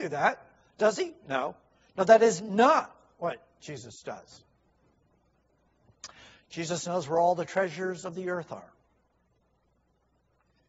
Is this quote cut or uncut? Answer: uncut